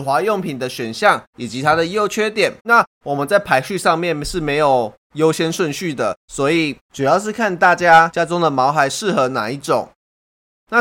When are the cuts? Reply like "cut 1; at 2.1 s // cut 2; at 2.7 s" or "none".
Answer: cut 1; at 2.6 s